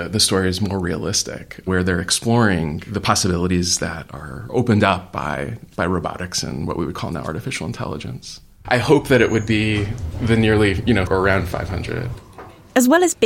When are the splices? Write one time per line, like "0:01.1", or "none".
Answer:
0:08.7
0:11.1